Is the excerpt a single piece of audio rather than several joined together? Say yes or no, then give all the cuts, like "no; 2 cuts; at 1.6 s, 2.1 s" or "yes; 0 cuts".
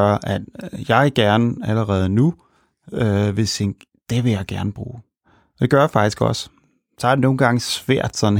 yes; 0 cuts